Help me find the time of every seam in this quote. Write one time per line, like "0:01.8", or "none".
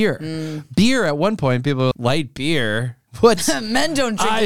0:01.9